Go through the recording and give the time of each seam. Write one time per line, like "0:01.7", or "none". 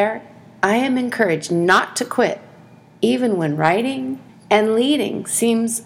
0:04.3